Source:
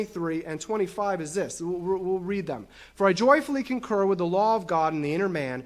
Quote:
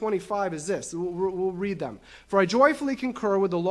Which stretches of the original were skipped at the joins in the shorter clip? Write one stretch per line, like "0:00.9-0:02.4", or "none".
none